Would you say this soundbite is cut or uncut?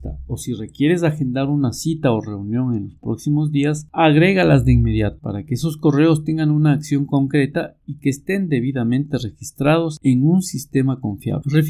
uncut